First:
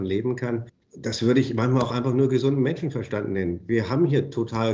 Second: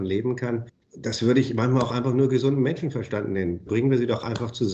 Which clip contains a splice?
second; 1 cut; at 3.7 s

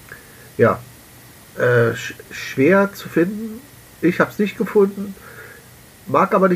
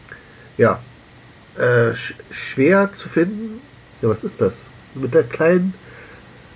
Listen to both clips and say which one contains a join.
second; 1 cut; at 3.9 s

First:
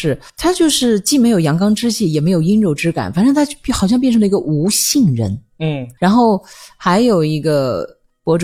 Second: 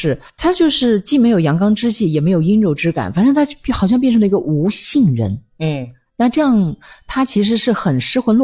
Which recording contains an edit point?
first; 1 cut; at 6.0 s

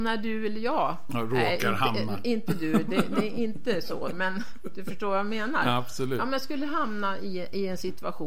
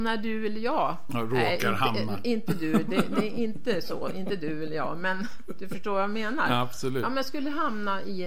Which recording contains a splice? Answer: first; 1 cut; at 4.1 s

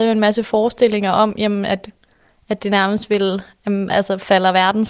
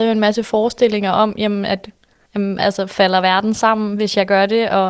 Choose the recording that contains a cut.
second; 1 cut; at 2.3 s

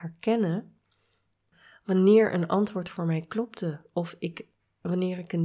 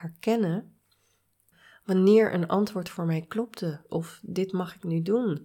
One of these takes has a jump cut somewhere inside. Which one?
second; 1 cut; at 3.9 s

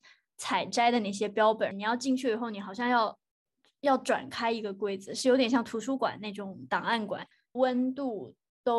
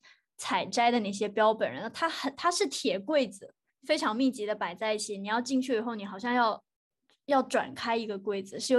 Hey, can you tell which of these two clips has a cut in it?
first; 2 cuts; at 1.7 s, 7.5 s

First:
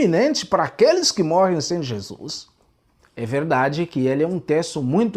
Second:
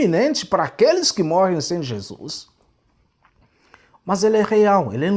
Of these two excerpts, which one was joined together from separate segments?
first; 1 cut; at 3.0 s

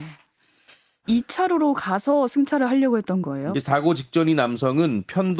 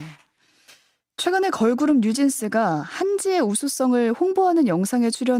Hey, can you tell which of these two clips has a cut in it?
first; 2 cuts; at 1.0 s, 3.5 s

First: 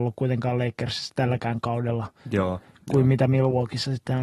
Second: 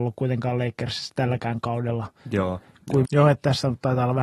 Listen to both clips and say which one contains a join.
second; 1 cut; at 3.0 s

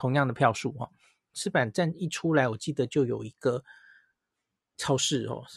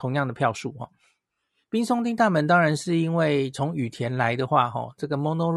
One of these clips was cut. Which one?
first; 1 cut; at 1.3 s

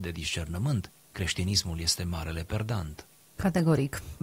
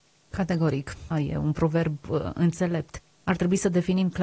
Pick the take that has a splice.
second; 1 cut; at 1.1 s

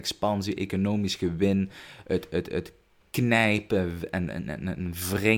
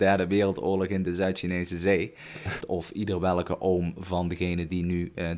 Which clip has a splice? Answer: second; 1 cut; at 2.6 s

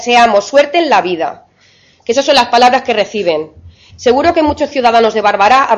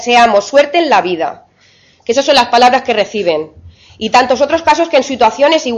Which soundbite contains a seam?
first; 1 cut; at 3.9 s

